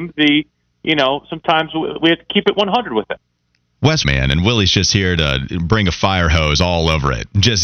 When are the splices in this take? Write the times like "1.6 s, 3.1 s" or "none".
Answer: 4.0 s